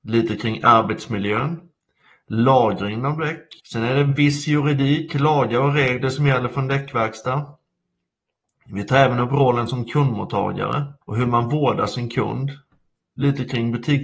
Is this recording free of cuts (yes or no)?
no